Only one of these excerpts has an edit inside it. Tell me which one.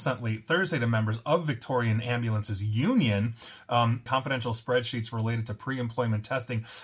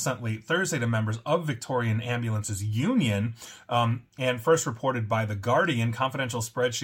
first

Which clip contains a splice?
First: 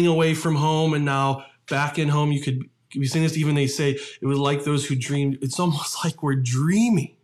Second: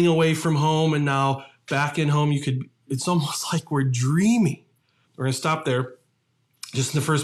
second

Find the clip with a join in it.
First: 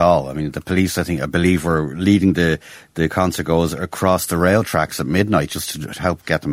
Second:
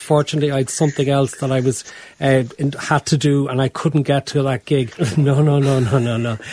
second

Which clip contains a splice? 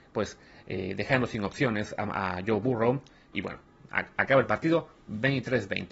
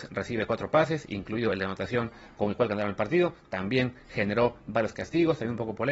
first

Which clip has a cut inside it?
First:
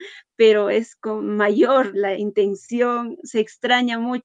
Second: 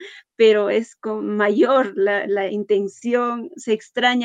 first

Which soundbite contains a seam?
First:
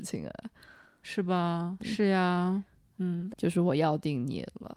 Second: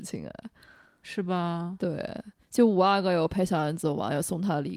first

